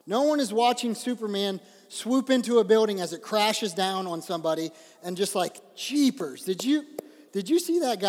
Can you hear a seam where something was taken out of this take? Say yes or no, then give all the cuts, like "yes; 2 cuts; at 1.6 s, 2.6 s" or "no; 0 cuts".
no; 0 cuts